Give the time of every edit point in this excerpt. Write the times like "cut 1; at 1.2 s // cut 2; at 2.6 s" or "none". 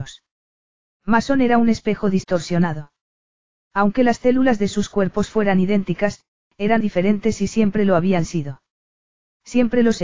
cut 1; at 6.8 s